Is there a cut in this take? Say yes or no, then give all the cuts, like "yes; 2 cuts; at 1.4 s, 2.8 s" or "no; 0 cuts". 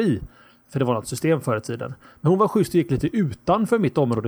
no; 0 cuts